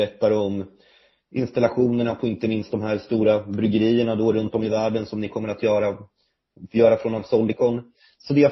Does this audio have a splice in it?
no; 0 cuts

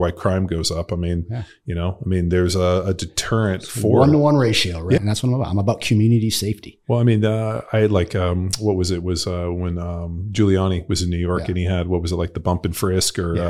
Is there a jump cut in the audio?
yes; 1 cut; at 5.0 s

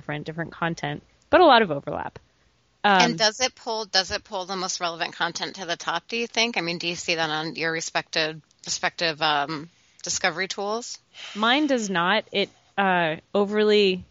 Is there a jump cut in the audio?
no; 0 cuts

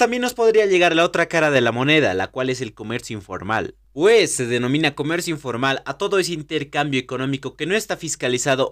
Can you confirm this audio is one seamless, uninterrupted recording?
no; 1 cut; at 3.8 s

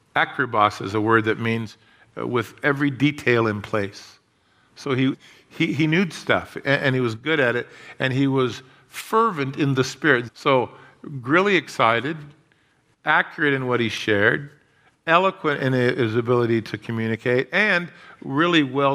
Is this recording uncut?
no; 2 cuts; at 5.1 s, 10.3 s

